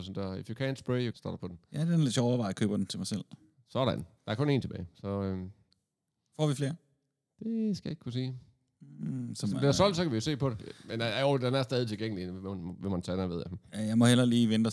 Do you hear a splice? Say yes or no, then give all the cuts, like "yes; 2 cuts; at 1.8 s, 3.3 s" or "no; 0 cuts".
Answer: yes; 1 cut; at 1.1 s